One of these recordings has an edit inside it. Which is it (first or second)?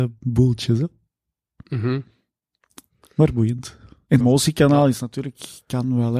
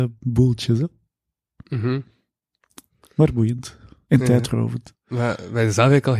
first